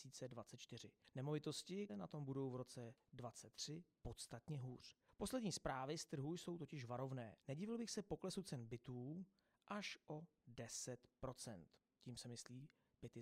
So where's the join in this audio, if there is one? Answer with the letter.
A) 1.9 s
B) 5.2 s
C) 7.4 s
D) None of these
A